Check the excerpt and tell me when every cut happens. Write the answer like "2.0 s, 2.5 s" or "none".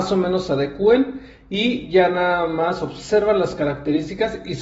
none